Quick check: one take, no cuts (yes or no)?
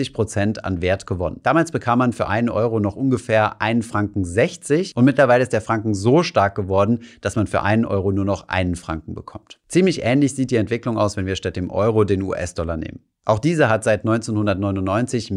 yes